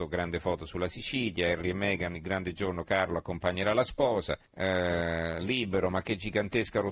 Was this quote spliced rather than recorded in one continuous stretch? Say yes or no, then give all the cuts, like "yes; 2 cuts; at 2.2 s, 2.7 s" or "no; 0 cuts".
yes; 1 cut; at 4.5 s